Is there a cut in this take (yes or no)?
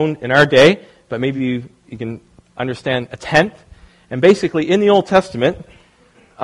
no